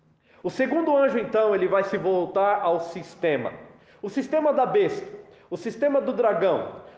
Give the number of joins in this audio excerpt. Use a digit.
0